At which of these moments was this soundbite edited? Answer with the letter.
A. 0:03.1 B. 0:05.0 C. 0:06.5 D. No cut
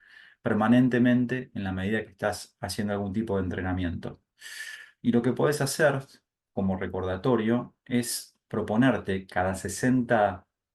B